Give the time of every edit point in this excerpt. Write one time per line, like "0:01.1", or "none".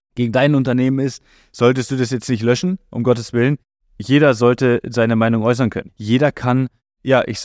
0:05.9